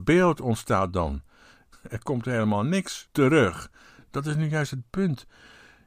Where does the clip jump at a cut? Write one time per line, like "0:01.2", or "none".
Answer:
0:01.7